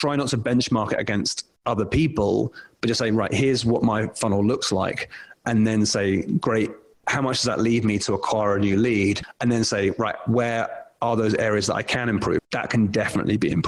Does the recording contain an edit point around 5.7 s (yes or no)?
no